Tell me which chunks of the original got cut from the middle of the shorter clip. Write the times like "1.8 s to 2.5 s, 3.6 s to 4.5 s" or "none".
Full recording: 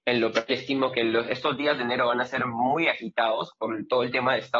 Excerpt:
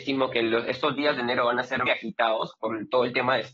2.5 s to 2.8 s